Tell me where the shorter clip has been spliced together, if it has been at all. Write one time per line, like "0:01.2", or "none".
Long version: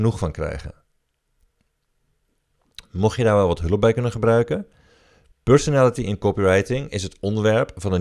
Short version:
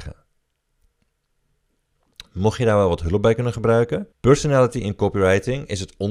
0:04.1